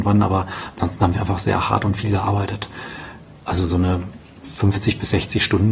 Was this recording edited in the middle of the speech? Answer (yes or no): yes